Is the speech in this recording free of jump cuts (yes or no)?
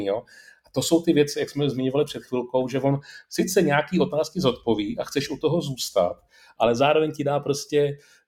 no